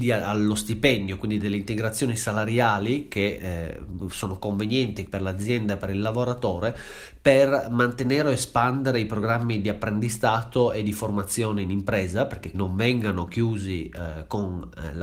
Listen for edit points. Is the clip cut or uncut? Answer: cut